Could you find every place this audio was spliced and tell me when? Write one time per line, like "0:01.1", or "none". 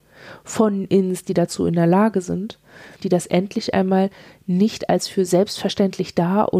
0:03.0